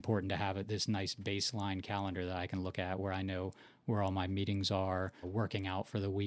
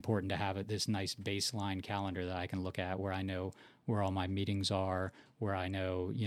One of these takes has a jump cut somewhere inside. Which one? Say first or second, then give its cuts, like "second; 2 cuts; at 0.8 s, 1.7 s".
first; 1 cut; at 5.2 s